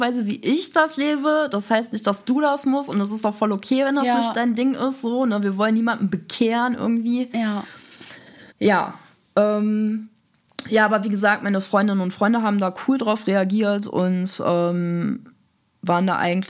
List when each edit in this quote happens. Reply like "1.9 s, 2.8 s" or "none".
8.5 s